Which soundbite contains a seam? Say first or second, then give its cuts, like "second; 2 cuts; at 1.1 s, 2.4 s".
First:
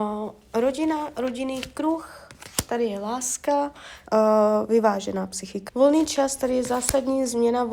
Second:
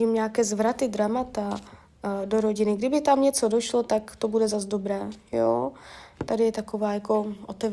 first; 2 cuts; at 4.1 s, 5.7 s